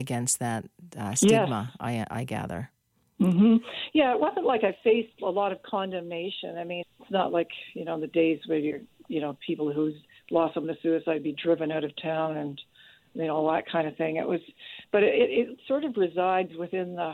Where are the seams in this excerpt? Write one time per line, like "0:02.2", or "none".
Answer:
0:06.8